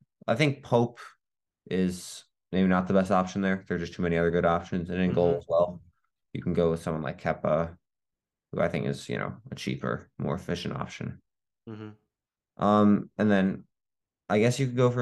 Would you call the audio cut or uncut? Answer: uncut